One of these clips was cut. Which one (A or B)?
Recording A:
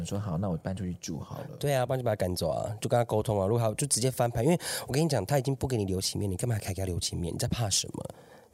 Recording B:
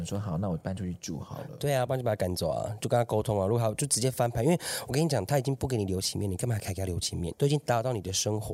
B